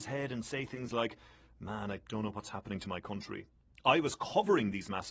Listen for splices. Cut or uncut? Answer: cut